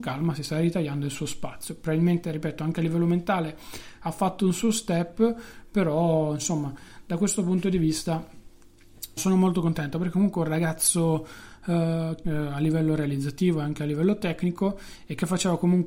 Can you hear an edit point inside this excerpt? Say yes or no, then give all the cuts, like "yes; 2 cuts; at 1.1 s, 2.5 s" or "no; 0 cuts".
yes; 2 cuts; at 9.2 s, 12.2 s